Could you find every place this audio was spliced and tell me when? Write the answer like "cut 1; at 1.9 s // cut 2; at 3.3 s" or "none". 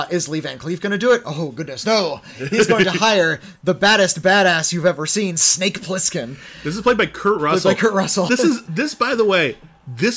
cut 1; at 8.3 s